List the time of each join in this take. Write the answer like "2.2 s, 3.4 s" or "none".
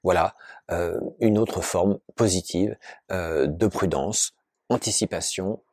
4.5 s